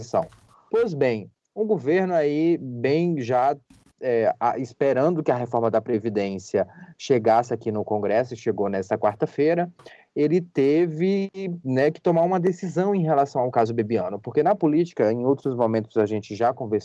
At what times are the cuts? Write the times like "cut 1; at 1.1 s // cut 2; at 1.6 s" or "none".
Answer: none